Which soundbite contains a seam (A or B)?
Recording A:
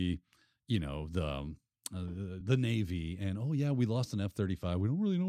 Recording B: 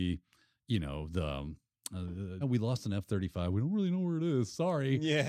B